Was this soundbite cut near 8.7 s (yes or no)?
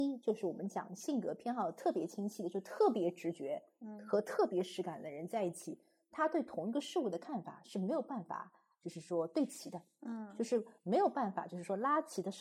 no